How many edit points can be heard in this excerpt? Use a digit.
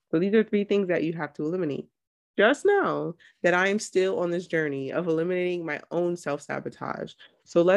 1